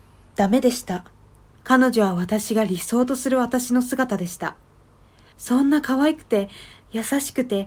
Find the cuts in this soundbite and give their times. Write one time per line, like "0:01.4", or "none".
0:01.5
0:05.3